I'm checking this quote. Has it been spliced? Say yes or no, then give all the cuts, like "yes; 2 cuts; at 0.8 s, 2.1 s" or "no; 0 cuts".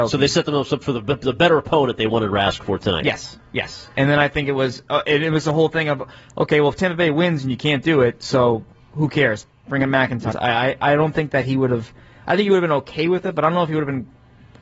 yes; 1 cut; at 10.3 s